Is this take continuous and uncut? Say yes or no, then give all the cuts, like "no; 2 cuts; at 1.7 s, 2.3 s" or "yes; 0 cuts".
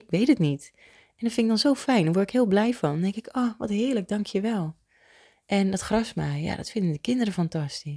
yes; 0 cuts